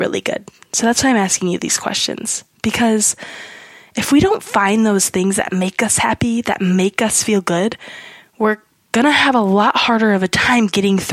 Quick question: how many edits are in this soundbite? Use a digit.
0